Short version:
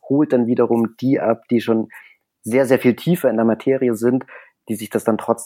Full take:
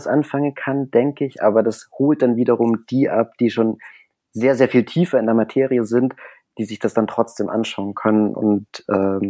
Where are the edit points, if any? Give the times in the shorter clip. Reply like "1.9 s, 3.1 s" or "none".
none